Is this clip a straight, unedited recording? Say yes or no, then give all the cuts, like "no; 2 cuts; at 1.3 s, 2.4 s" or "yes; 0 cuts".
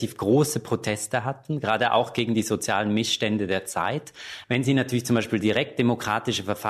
no; 1 cut; at 4.4 s